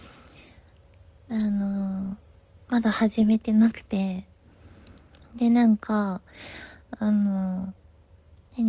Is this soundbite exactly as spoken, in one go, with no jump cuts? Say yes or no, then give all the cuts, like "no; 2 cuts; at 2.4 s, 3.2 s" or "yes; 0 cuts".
yes; 0 cuts